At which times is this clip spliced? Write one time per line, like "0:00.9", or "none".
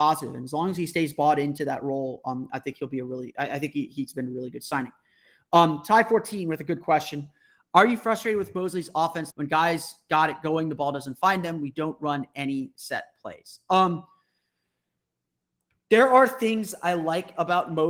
0:09.3